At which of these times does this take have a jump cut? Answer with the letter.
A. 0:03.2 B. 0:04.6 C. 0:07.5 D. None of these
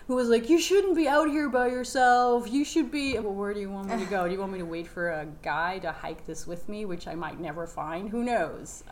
A